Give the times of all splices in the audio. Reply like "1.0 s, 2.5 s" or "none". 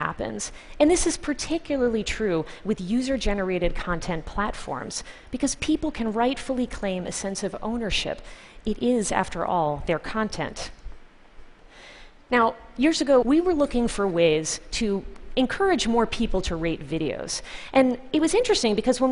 13.2 s